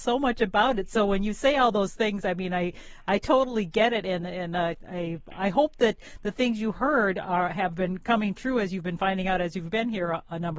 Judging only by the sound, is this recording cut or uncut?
uncut